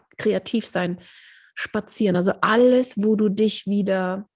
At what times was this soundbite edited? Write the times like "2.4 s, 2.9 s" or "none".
none